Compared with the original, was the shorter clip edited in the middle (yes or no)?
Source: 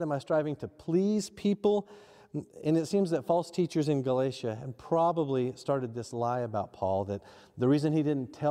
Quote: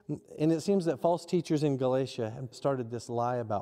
yes